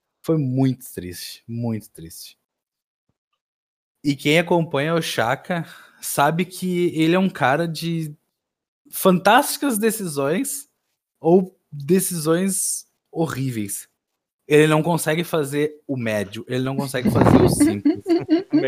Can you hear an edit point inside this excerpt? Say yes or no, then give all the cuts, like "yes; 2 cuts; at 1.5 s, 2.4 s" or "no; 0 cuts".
no; 0 cuts